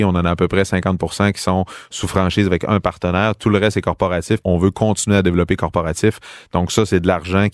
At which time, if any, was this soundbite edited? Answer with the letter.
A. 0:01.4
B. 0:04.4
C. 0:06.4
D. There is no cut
B